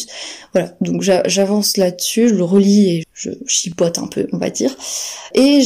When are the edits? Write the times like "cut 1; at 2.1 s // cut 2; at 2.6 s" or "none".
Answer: cut 1; at 3.0 s